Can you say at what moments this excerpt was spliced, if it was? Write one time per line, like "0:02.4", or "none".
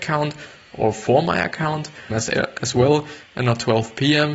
0:02.1